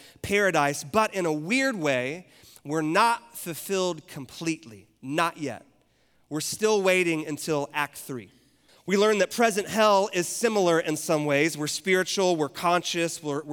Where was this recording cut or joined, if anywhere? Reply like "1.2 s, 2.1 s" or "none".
8.7 s